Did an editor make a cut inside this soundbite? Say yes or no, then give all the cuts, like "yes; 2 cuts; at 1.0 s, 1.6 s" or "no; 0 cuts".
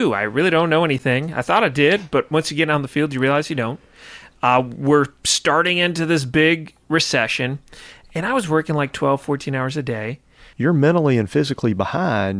yes; 1 cut; at 10.5 s